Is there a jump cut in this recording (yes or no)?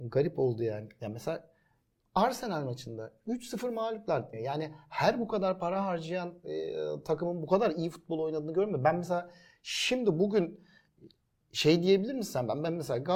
yes